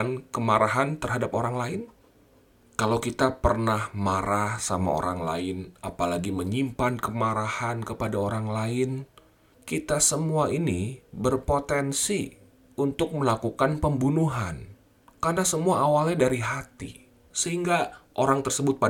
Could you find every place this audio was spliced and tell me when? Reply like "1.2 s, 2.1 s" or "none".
9.5 s, 17.3 s